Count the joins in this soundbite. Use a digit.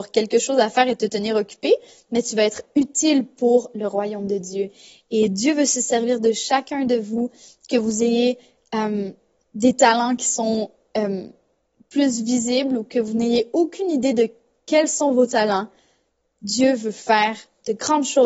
0